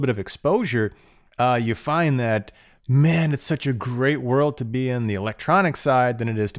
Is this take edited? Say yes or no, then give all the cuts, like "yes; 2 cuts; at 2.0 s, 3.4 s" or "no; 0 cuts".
no; 0 cuts